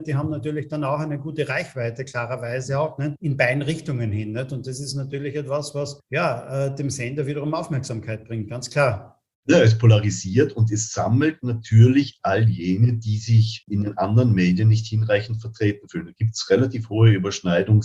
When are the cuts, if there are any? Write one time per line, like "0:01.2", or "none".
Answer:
none

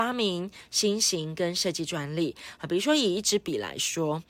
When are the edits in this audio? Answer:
none

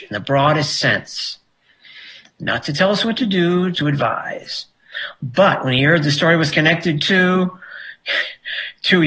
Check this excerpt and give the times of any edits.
0:03.7

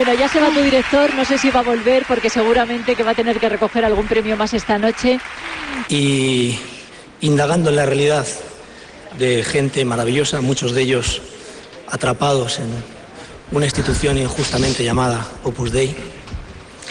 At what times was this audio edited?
0:05.8
0:09.1

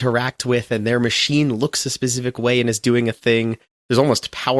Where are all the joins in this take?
none

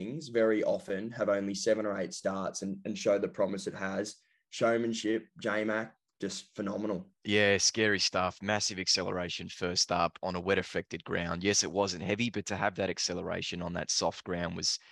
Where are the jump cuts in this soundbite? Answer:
none

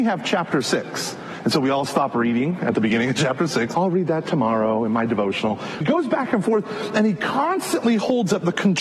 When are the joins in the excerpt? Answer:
0:03.7
0:05.8

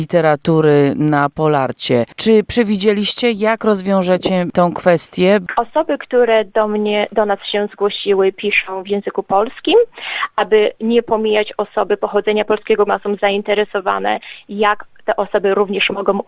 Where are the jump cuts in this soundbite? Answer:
0:10.3
0:12.9

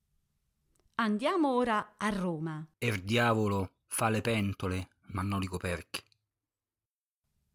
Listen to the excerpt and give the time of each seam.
0:02.7

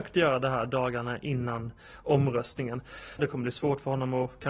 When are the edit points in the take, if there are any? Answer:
0:03.2

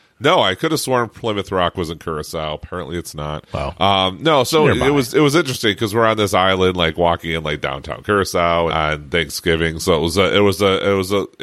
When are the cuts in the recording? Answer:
0:08.7

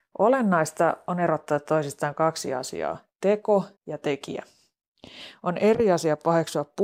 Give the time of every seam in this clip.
0:03.8

